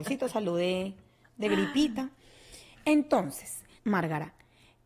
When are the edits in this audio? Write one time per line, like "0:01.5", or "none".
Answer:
0:03.8